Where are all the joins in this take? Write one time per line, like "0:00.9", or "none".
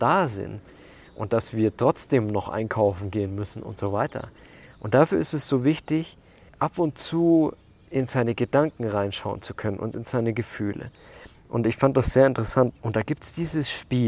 0:04.7
0:12.7